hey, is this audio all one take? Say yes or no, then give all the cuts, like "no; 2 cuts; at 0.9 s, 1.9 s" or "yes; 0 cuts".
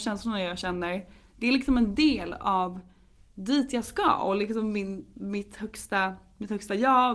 yes; 0 cuts